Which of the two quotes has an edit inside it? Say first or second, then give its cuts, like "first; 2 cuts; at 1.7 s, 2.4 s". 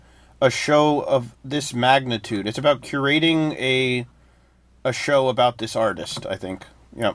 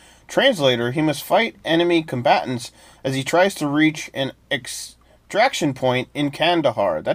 first; 1 cut; at 1.3 s